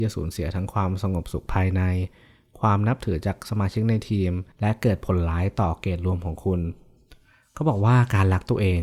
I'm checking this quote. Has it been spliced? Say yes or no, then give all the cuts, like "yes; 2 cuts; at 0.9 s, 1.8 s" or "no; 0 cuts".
yes; 1 cut; at 4.5 s